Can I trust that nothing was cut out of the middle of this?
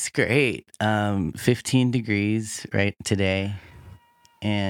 yes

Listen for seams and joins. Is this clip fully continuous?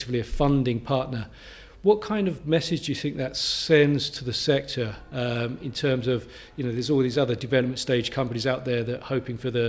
yes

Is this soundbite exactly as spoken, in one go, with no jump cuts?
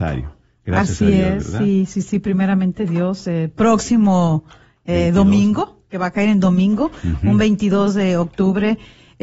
yes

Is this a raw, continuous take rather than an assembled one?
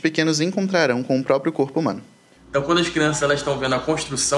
no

